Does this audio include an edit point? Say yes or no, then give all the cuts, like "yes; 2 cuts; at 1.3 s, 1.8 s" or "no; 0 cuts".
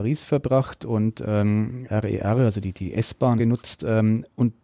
yes; 2 cuts; at 1.9 s, 3.4 s